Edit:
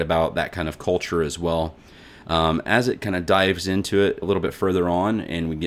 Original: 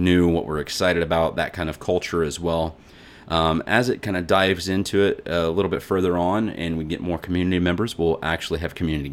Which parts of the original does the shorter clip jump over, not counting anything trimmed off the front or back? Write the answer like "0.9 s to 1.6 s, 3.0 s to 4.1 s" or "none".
5.2 s to 5.5 s